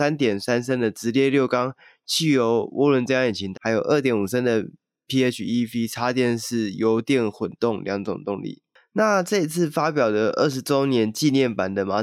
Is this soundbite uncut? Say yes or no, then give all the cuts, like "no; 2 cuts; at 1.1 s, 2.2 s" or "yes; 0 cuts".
no; 1 cut; at 3.5 s